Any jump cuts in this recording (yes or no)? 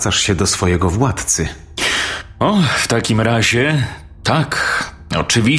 no